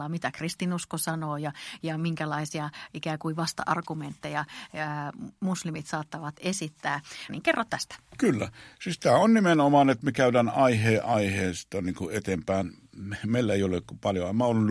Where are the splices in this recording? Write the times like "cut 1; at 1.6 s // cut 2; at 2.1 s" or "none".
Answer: cut 1; at 7.3 s